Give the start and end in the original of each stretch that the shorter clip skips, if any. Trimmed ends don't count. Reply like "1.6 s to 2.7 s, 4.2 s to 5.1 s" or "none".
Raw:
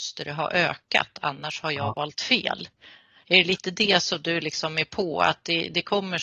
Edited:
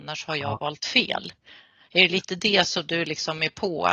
none